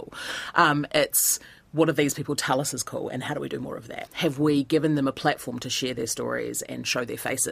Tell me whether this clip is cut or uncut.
cut